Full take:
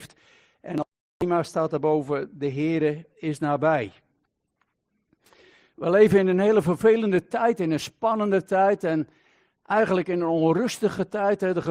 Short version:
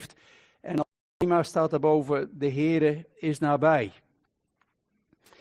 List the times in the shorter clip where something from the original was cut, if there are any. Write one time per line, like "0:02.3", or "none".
none